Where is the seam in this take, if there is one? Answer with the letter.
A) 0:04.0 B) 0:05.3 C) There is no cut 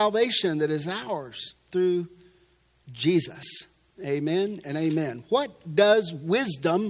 A